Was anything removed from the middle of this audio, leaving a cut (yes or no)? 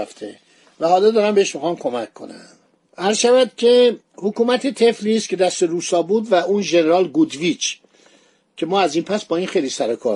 yes